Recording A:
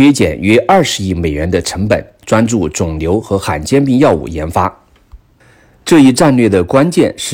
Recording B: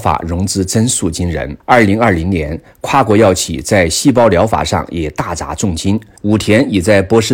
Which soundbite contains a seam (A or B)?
B